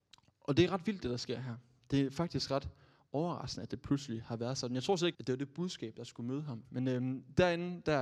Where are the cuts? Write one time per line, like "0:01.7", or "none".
0:05.1
0:06.6